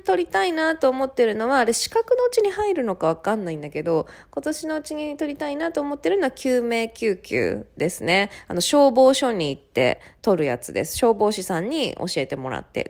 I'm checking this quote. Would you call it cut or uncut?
uncut